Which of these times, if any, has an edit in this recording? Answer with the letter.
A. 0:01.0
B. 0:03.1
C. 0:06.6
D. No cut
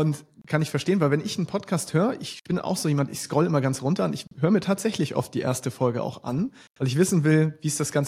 D